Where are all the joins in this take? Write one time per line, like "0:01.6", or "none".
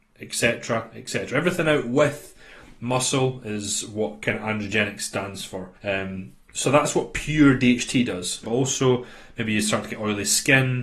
0:05.8
0:08.4